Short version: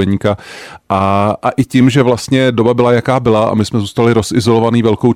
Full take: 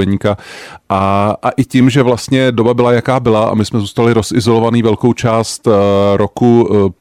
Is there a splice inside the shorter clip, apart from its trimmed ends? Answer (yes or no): no